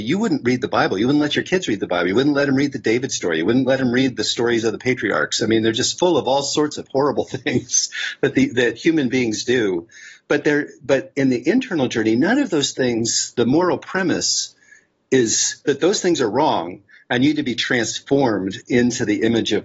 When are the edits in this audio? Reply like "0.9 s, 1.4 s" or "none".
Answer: none